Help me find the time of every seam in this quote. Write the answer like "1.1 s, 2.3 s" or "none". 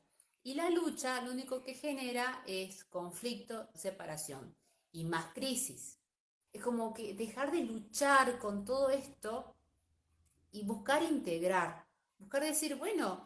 3.7 s, 6.5 s